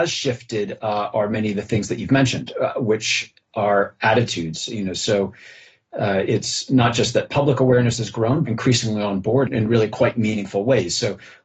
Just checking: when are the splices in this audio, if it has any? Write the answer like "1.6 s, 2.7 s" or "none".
8.4 s, 9.5 s